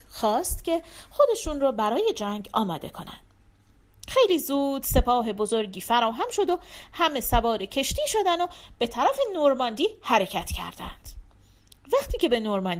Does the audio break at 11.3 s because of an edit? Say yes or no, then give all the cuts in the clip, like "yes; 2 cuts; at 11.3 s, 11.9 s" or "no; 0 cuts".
no; 1 cut; at 3.9 s